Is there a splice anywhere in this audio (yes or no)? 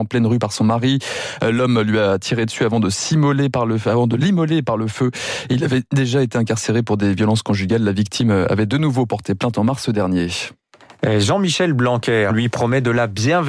yes